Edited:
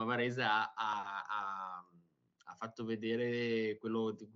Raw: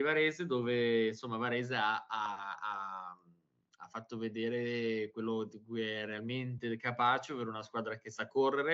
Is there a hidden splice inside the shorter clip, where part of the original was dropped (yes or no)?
no